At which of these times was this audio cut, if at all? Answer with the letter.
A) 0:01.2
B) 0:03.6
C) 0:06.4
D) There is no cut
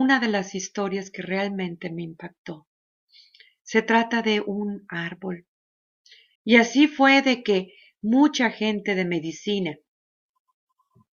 C